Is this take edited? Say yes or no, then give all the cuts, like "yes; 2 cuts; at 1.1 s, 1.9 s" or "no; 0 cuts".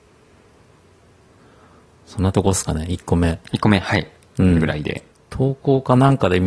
yes; 1 cut; at 5.1 s